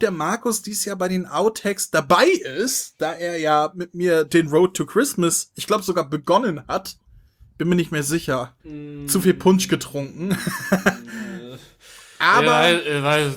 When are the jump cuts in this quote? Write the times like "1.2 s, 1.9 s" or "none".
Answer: 8.6 s